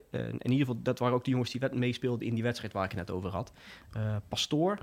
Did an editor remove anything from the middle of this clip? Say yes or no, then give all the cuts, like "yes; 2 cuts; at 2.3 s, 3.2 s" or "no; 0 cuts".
no; 0 cuts